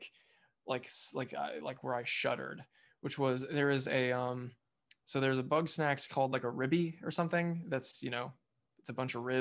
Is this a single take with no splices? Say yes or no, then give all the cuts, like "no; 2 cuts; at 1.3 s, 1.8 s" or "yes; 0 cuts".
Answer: yes; 0 cuts